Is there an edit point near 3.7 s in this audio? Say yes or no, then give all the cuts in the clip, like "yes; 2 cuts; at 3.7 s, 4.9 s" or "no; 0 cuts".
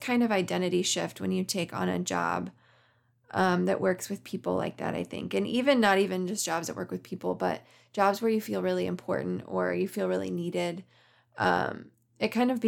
no; 0 cuts